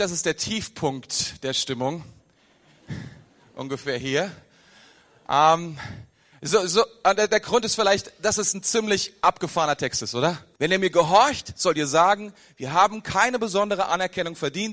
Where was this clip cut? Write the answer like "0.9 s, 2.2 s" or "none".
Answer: 10.6 s